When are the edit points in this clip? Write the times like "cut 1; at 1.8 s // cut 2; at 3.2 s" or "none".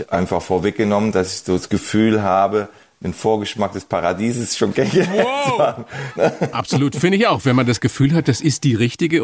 cut 1; at 6.2 s